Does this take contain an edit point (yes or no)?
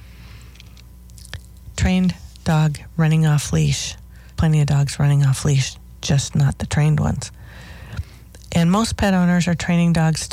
yes